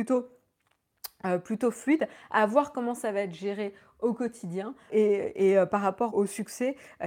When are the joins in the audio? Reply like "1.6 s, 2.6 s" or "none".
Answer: 4.9 s, 6.1 s